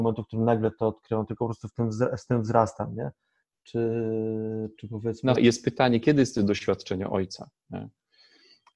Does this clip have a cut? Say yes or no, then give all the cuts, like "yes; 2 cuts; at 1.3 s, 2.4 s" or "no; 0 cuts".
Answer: yes; 1 cut; at 5.4 s